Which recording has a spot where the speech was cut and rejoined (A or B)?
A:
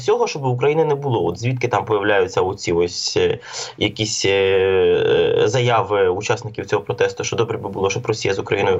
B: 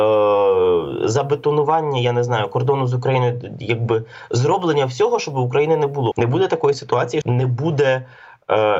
B